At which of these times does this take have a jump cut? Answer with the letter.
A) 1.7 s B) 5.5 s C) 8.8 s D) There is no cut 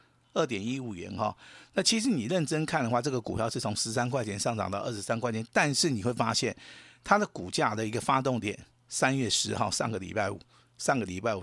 D